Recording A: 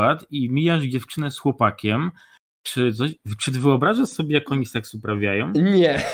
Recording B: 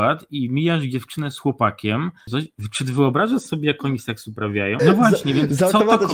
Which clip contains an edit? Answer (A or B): B